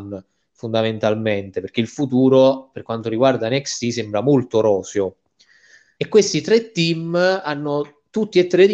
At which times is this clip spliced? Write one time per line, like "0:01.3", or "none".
0:06.0

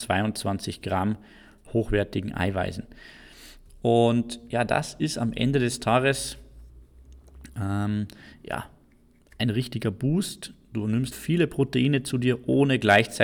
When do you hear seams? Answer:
0:11.1

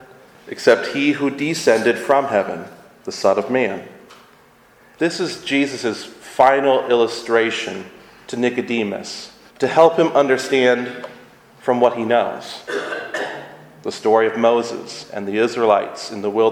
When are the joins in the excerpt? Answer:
0:05.0
0:09.5

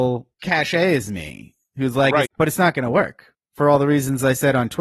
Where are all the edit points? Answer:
0:02.2

